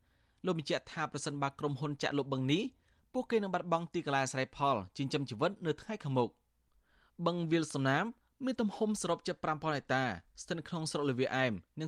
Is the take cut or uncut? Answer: uncut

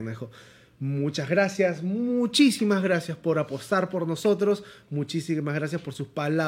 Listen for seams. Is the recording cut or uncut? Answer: uncut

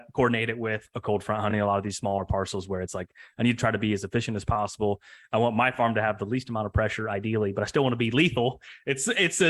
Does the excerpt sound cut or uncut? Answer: uncut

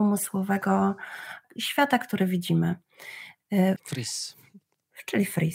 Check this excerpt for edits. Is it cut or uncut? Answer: cut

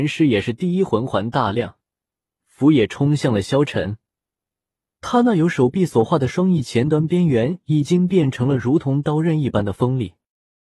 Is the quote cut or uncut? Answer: cut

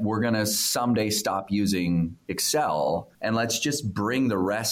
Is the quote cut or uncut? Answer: cut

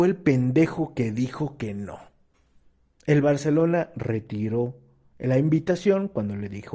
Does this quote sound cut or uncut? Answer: uncut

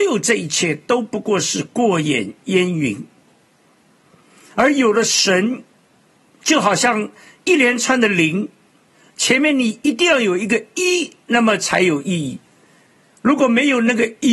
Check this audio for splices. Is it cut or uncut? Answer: uncut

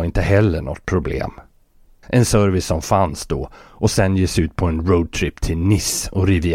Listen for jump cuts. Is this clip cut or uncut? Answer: cut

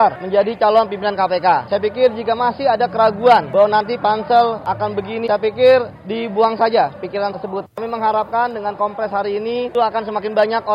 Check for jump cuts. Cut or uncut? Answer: cut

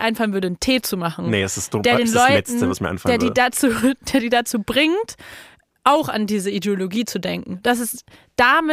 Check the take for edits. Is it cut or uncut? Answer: uncut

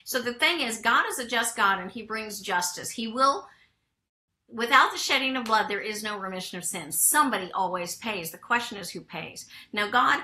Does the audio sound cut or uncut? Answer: uncut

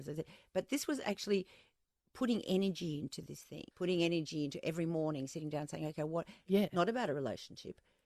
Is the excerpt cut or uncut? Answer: cut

